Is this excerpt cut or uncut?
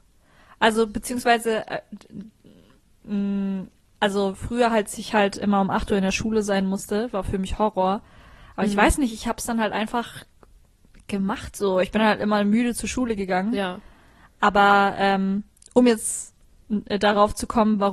uncut